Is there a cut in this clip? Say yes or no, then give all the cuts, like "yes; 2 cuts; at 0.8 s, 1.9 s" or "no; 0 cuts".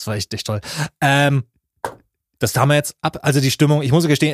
no; 0 cuts